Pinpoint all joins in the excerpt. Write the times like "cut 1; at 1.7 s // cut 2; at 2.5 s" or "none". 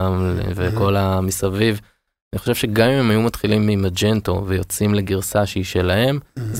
none

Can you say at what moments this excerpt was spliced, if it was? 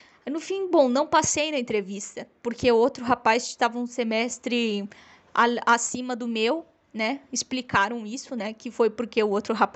none

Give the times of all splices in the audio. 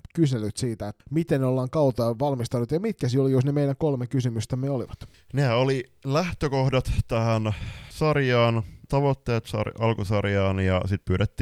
cut 1; at 1.0 s

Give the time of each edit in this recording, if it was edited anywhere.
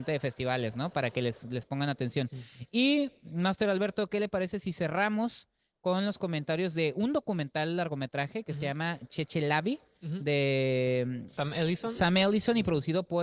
none

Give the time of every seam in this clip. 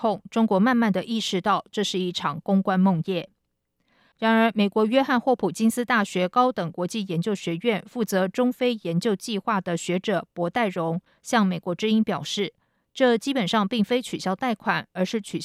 none

